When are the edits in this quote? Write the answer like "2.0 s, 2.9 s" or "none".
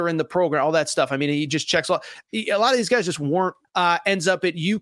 3.6 s